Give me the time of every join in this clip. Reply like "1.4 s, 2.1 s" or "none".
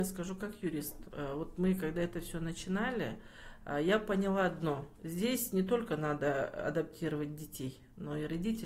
none